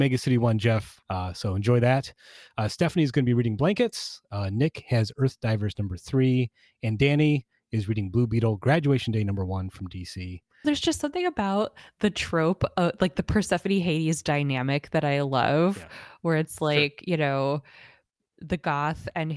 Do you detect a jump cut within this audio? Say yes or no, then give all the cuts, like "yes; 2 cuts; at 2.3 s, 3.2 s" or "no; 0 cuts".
yes; 2 cuts; at 1.0 s, 10.6 s